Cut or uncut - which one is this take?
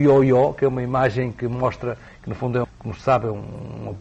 cut